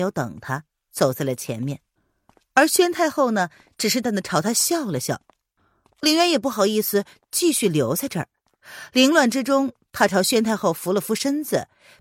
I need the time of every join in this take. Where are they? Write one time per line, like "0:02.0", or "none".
0:04.0

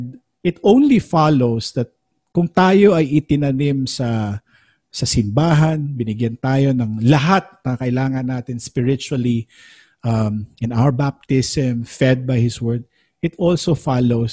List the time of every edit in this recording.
none

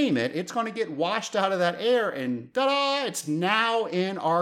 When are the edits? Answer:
none

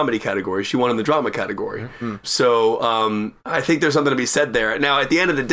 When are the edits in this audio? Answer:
0:02.2
0:03.4

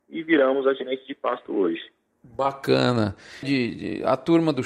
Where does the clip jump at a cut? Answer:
0:02.1
0:03.4

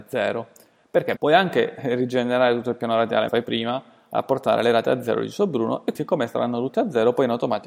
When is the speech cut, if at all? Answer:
0:01.2
0:03.3
0:06.0

